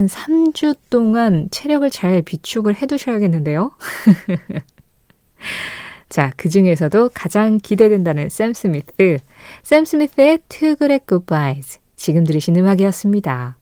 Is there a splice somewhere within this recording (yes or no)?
no